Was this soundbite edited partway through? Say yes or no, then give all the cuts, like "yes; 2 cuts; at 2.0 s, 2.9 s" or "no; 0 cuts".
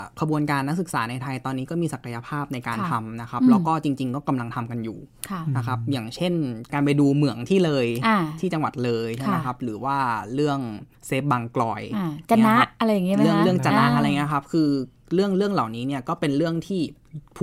yes; 1 cut; at 10.9 s